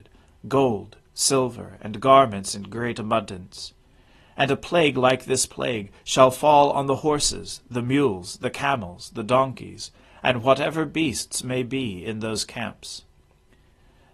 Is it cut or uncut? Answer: uncut